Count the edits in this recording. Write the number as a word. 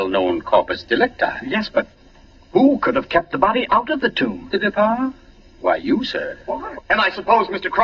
two